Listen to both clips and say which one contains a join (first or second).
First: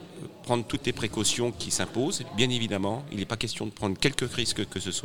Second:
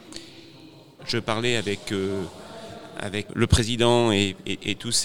second